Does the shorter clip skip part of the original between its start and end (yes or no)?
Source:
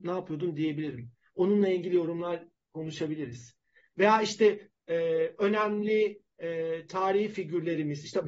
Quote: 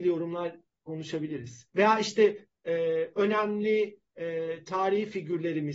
yes